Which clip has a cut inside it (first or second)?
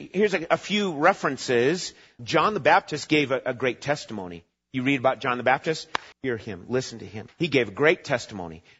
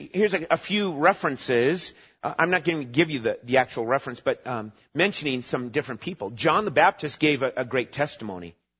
first